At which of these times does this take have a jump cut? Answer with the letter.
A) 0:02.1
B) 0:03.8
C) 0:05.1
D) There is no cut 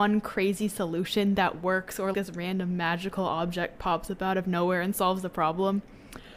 A